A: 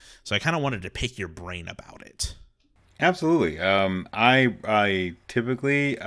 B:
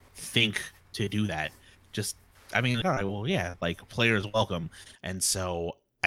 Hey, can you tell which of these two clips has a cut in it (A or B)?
B